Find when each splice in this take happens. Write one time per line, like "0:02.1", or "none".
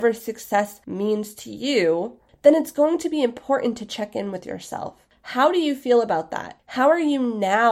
none

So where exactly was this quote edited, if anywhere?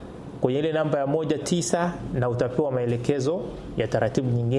0:01.4

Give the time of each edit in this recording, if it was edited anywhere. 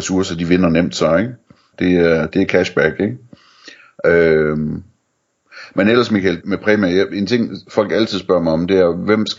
0:01.7
0:06.4

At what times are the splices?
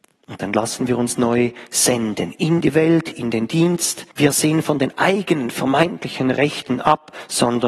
0:04.1

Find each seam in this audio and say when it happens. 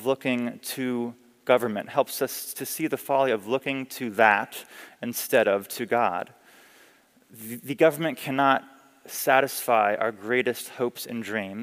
none

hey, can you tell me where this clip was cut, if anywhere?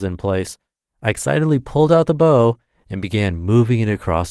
none

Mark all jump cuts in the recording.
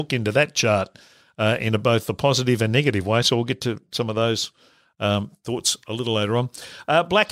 none

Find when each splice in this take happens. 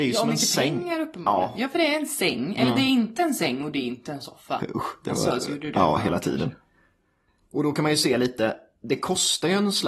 0:04.6

